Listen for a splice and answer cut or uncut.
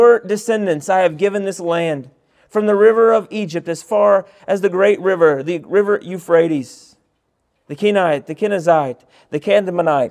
uncut